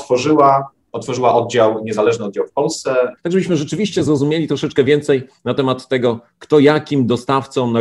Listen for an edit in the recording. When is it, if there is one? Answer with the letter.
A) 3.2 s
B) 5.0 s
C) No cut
A